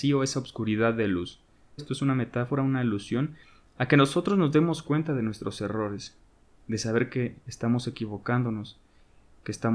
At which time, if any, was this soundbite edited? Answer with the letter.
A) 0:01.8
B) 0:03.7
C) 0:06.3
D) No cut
A